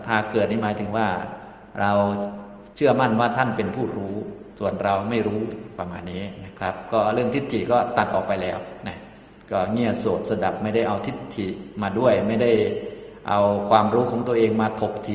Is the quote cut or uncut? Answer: cut